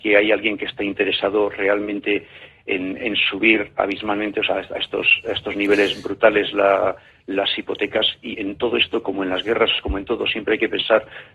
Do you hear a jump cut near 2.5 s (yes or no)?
no